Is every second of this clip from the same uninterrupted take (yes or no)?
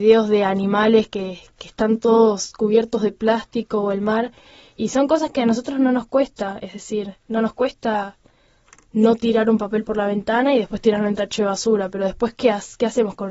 yes